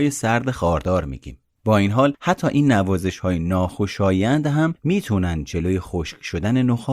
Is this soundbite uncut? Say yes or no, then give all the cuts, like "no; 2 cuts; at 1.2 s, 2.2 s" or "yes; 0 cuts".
no; 1 cut; at 1.6 s